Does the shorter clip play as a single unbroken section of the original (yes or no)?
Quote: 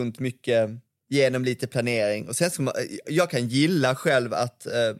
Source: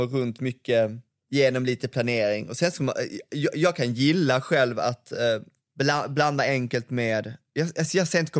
no